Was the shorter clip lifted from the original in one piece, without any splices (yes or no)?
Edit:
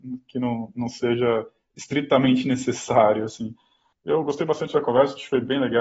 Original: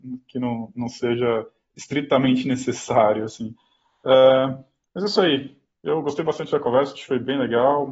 no